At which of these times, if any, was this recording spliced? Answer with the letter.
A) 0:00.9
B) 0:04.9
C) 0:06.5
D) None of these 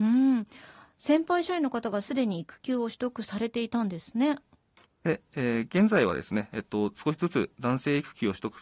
B